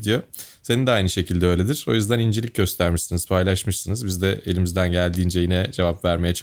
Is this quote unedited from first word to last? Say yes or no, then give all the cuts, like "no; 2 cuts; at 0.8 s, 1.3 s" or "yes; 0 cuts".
yes; 0 cuts